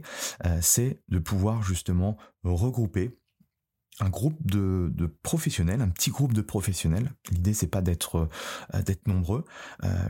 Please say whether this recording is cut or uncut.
uncut